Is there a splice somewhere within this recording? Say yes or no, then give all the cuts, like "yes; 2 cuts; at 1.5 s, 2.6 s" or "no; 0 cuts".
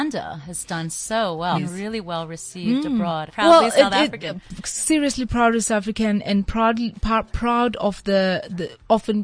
yes; 2 cuts; at 1.5 s, 3.3 s